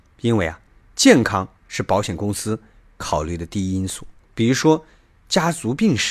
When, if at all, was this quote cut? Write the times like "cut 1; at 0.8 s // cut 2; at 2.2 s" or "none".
none